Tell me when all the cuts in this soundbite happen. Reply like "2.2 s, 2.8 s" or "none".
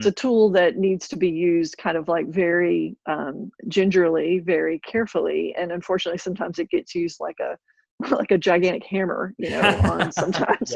none